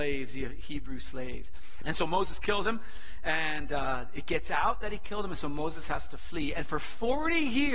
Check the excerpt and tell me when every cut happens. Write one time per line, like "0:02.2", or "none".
0:01.8